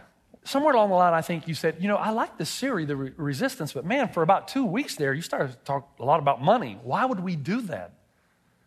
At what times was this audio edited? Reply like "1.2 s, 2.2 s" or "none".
none